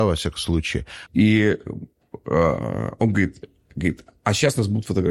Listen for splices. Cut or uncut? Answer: cut